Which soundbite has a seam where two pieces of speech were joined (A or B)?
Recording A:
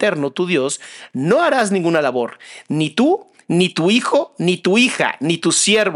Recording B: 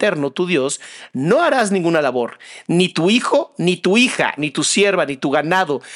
B